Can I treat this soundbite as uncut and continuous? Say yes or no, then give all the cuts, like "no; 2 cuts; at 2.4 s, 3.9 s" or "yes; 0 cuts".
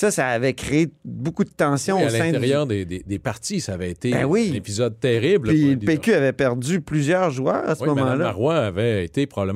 yes; 0 cuts